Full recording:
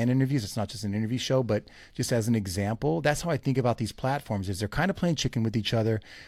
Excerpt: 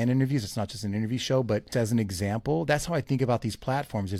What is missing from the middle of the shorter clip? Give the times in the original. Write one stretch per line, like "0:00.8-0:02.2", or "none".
0:01.7-0:02.1